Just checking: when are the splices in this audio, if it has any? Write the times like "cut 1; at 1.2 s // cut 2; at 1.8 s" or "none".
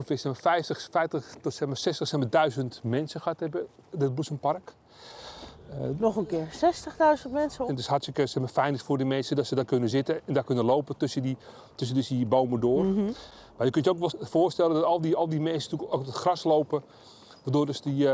cut 1; at 7.7 s